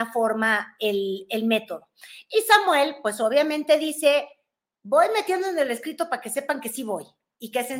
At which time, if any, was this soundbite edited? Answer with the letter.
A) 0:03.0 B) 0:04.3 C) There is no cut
C